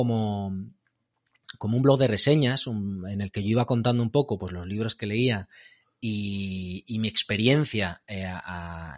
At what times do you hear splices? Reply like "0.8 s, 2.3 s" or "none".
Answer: none